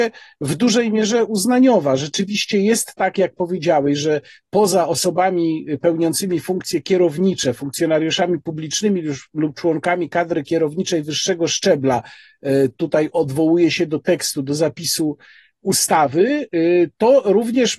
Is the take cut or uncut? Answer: uncut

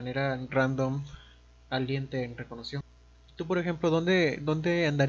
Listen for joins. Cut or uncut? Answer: uncut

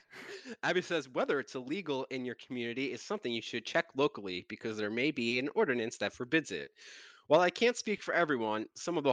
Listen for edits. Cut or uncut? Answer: uncut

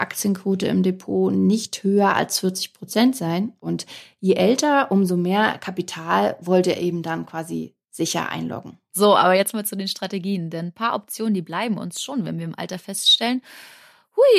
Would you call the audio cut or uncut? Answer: cut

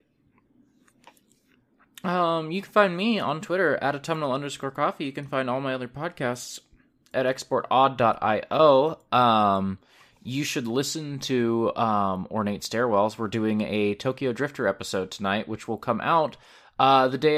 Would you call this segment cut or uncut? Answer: uncut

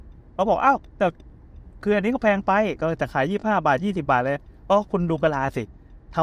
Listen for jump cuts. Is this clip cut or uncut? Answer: uncut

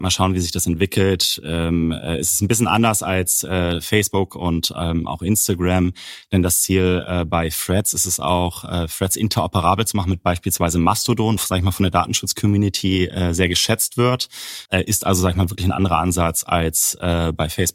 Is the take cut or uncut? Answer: cut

